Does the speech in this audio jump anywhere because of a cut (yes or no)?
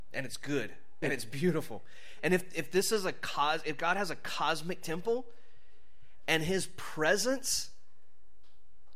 yes